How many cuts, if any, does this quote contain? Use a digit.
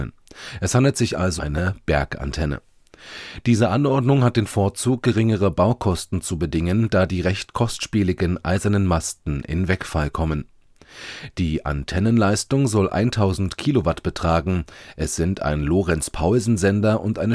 1